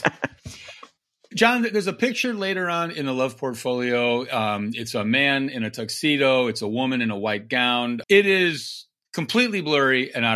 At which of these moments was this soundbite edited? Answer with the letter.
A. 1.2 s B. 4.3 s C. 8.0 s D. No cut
C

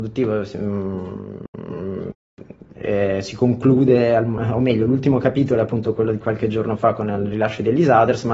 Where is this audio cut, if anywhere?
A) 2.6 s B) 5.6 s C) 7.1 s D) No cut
D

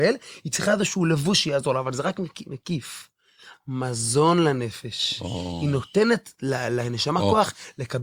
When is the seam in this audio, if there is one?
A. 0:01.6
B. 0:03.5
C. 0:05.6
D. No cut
B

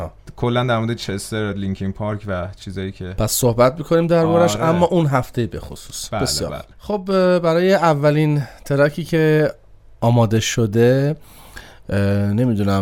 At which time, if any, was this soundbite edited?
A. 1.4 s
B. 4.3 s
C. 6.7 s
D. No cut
C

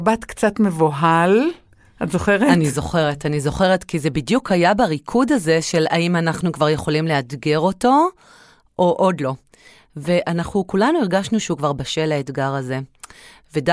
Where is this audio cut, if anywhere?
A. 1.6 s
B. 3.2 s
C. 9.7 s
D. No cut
D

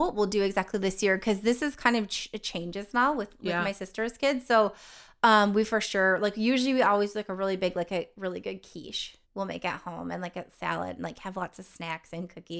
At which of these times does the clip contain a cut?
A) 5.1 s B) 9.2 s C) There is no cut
B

